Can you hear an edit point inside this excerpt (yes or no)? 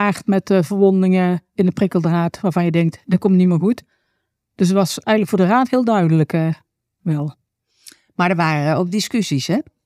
no